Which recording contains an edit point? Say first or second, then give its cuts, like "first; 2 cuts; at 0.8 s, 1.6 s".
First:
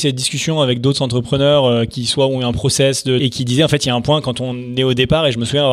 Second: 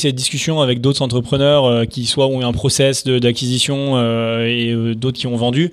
first; 1 cut; at 3.2 s